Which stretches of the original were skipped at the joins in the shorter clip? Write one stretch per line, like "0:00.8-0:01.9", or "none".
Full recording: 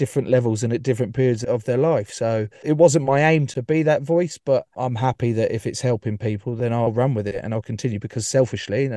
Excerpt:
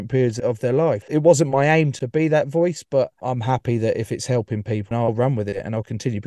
0:02.1-0:02.6
0:06.5-0:06.7